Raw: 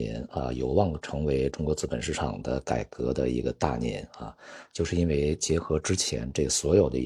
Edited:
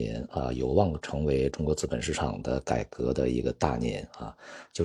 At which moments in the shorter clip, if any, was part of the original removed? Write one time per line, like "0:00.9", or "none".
none